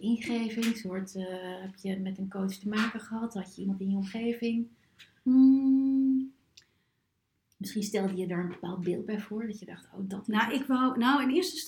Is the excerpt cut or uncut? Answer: uncut